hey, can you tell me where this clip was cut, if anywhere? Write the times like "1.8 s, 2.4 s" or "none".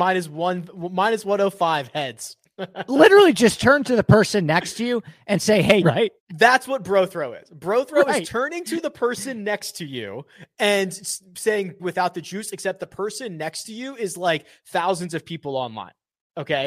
5.8 s, 11.8 s

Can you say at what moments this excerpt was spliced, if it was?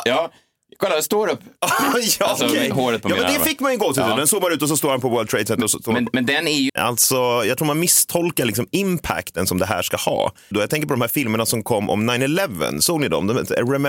6.7 s, 10.5 s

